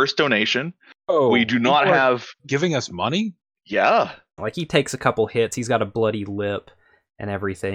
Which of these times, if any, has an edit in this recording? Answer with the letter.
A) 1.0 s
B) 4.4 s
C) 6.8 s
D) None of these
B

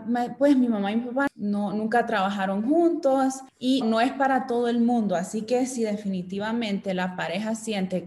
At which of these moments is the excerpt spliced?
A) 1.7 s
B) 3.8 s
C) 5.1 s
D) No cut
B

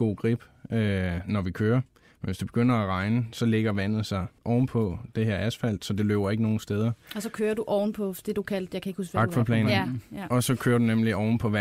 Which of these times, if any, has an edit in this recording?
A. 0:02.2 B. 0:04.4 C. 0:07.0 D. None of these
B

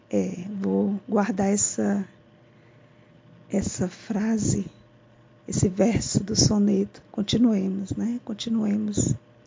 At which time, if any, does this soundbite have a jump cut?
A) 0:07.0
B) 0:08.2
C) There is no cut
A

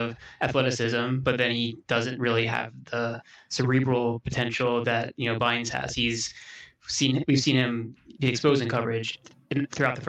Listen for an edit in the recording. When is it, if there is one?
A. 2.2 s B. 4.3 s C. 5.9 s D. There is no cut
C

